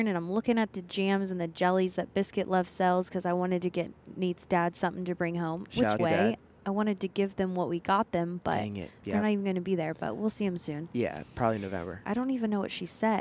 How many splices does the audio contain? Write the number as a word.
two